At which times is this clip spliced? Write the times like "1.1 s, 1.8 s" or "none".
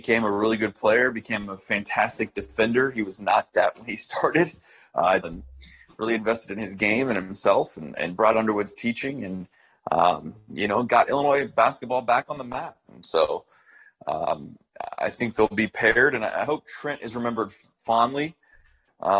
5.2 s, 12.9 s